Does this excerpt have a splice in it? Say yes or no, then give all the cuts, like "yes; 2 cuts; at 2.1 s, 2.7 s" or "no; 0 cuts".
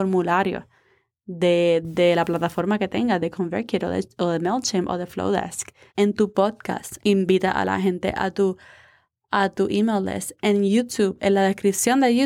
yes; 2 cuts; at 5.9 s, 7.0 s